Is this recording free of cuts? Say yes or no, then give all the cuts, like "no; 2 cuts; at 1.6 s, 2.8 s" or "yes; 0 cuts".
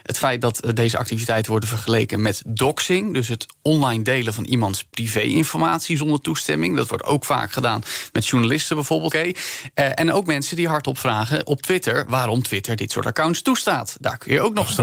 no; 2 cuts; at 3.6 s, 9.1 s